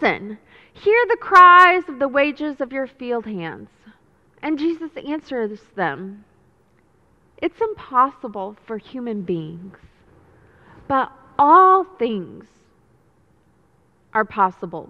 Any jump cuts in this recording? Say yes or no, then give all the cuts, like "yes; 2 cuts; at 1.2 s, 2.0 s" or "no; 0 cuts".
yes; 1 cut; at 4.3 s